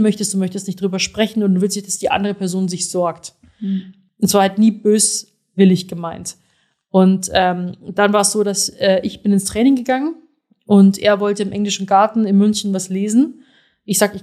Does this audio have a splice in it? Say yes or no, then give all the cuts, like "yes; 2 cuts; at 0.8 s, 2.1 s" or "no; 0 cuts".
no; 0 cuts